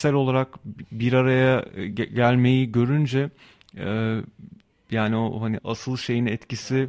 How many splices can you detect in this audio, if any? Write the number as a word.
one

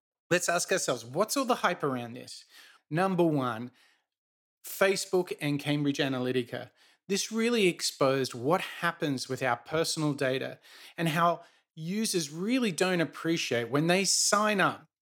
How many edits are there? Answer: one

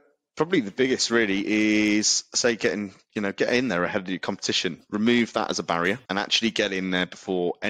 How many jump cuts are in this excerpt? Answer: one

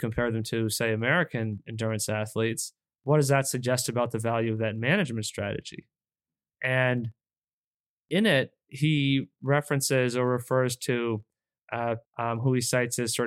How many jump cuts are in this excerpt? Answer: two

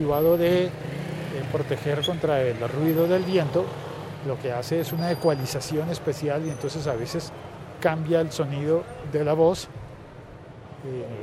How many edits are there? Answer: zero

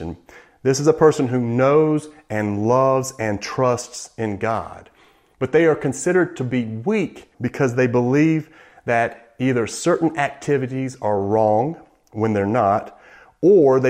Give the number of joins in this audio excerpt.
one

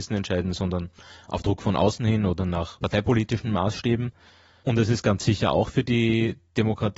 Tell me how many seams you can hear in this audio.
zero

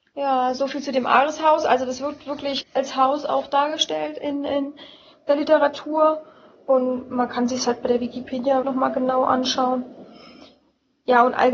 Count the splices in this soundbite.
two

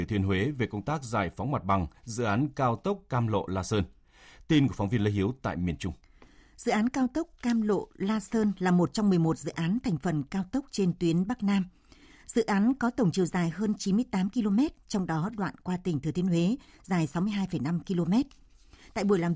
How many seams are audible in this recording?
zero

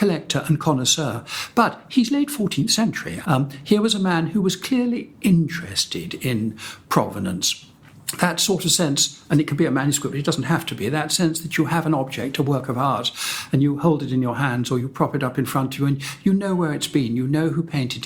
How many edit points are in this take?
one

